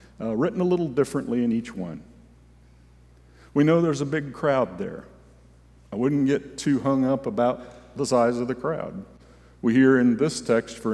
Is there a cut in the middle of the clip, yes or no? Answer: no